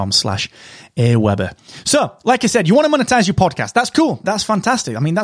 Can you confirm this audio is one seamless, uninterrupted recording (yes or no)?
no